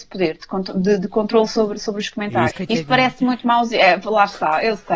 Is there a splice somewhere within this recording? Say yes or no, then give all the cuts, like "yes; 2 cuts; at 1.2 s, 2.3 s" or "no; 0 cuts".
yes; 1 cut; at 2.5 s